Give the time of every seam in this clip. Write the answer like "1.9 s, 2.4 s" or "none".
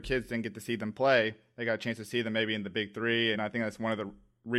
3.3 s